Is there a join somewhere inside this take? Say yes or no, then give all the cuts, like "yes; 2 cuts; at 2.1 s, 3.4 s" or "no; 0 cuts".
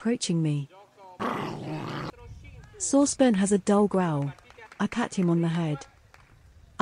yes; 1 cut; at 4.7 s